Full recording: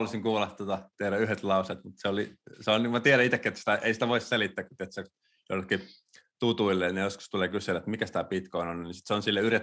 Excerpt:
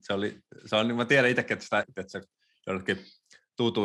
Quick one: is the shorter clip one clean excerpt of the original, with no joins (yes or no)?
no